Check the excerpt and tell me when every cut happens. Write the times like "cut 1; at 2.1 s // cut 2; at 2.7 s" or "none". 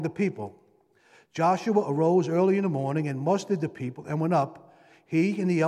none